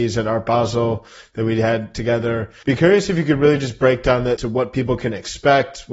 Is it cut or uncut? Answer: cut